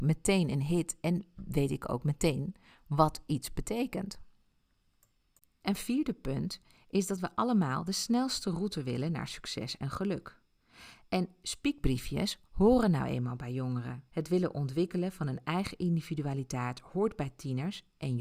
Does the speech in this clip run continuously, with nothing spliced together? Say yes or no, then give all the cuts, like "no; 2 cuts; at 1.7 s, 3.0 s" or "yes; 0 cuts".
no; 2 cuts; at 5.6 s, 14.1 s